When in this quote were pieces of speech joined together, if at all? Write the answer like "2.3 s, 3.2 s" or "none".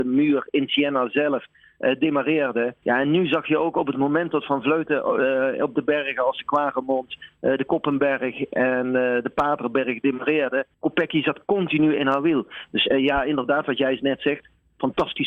2.8 s, 10.7 s, 12.7 s